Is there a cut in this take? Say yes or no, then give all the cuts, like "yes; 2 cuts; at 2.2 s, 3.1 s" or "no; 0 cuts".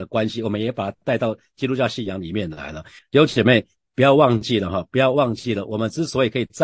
yes; 1 cut; at 3.0 s